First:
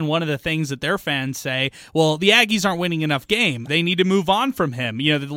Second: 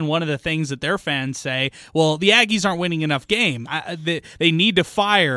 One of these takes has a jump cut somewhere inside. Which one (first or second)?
first